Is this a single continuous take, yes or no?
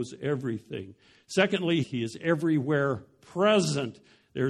no